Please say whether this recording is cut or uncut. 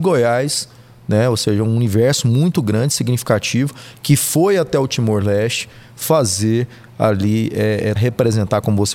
cut